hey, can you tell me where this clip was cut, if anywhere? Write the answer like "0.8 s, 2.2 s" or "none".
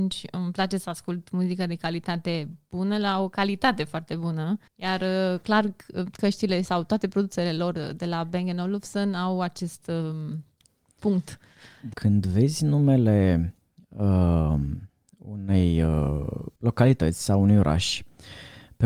4.7 s, 11.9 s, 16.6 s

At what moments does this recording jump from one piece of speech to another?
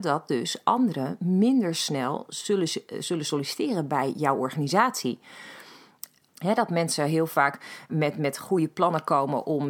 6.3 s, 7.9 s

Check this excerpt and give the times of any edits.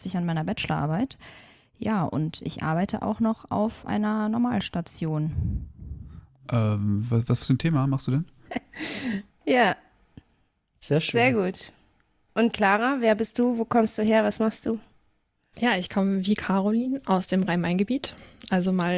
8.4 s

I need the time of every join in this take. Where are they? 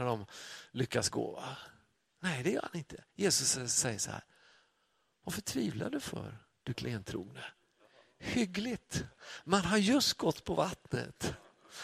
none

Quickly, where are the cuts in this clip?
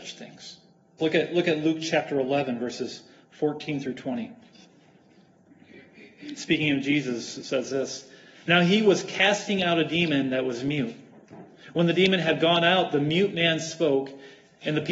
1.0 s

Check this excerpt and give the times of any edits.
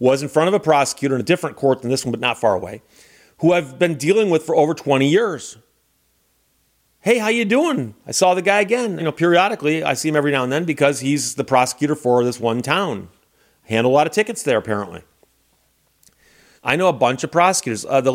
9.0 s, 16.6 s

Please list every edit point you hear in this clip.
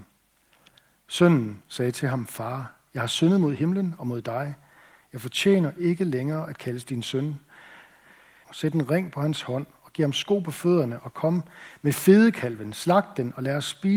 8.4 s

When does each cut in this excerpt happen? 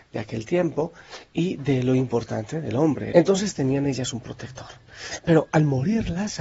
3.1 s

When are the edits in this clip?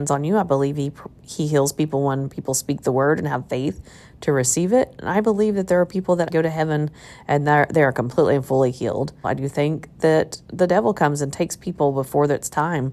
6.3 s, 9.2 s

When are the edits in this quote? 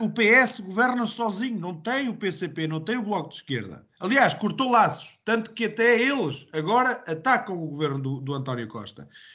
none

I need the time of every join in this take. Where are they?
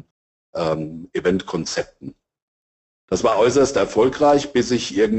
none

